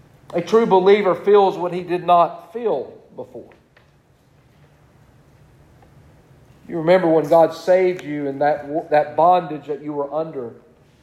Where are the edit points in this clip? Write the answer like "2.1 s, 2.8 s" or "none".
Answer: none